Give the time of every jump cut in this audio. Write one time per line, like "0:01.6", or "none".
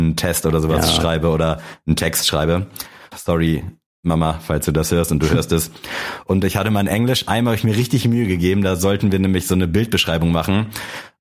0:03.1